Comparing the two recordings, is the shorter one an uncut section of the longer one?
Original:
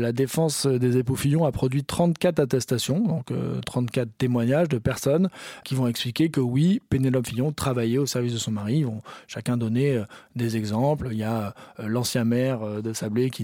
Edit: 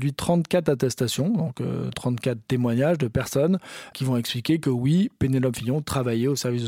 yes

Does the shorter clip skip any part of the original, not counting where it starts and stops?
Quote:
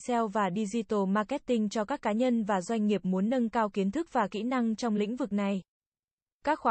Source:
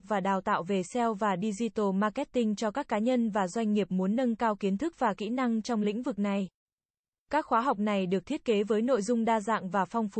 no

